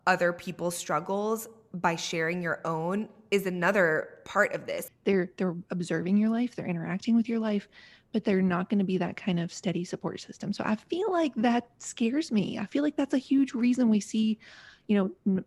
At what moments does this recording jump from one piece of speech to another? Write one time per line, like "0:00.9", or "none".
0:04.9